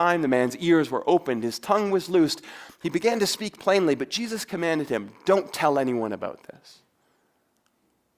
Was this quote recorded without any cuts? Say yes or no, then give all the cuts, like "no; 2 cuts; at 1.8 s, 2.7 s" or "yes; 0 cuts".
yes; 0 cuts